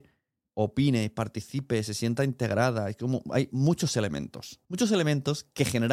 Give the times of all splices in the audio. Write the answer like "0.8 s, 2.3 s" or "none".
4.6 s